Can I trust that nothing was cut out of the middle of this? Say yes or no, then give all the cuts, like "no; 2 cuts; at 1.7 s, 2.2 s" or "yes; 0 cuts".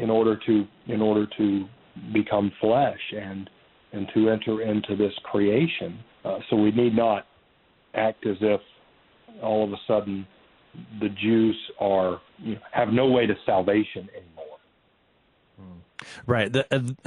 no; 2 cuts; at 6.1 s, 12.3 s